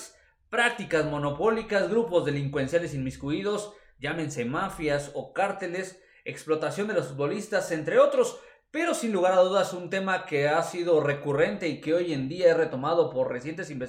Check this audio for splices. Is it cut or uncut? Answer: uncut